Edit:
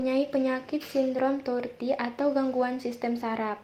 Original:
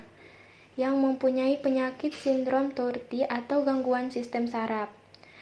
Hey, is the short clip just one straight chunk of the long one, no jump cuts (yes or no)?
yes